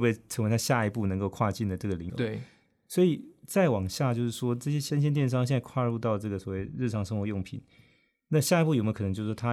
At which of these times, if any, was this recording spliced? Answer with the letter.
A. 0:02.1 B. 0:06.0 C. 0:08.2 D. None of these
A